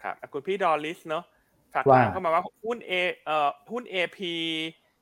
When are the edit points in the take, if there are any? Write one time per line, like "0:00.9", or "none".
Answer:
none